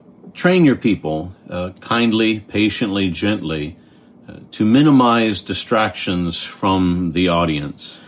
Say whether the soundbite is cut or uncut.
uncut